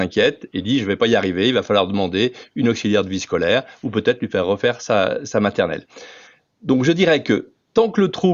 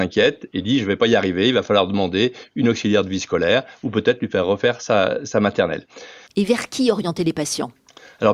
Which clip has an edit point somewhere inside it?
second; 1 cut; at 6.3 s

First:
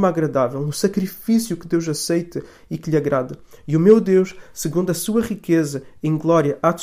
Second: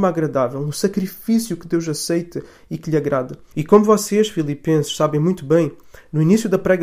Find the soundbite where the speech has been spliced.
second; 1 cut; at 3.5 s

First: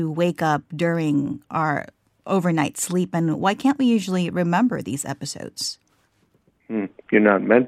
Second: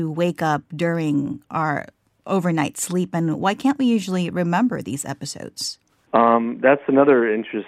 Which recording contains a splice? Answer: second; 1 cut; at 6.1 s

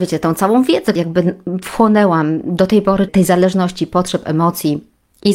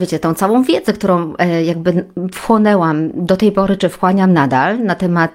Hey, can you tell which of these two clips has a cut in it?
first; 2 cuts; at 1.0 s, 3.1 s

